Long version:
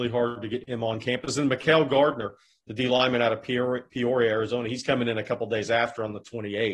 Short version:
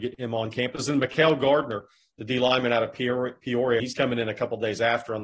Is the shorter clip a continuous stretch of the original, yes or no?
no